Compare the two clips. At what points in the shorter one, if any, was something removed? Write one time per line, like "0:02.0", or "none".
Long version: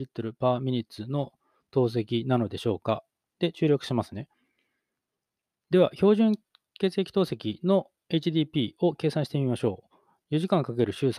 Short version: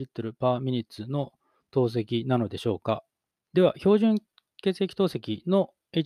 0:03.3